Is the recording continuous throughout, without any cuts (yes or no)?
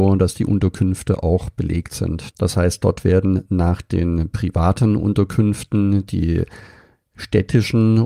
no